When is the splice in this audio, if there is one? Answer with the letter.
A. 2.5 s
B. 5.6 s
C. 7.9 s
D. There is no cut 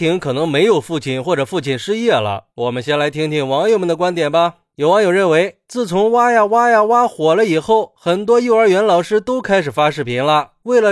A